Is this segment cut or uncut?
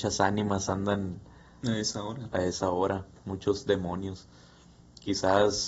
uncut